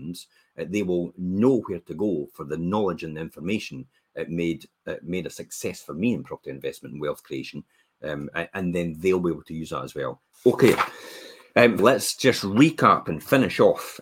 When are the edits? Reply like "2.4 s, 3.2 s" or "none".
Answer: 10.3 s, 11.8 s